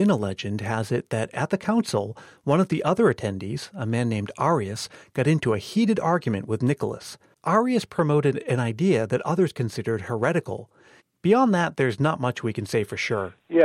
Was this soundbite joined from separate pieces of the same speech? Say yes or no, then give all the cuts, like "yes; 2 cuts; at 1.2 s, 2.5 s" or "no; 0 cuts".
yes; 1 cut; at 11.0 s